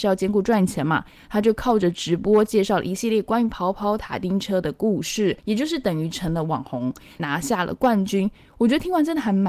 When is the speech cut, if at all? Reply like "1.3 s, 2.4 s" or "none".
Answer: 5.4 s, 7.2 s